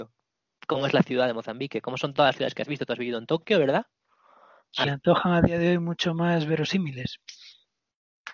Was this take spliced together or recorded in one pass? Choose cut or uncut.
cut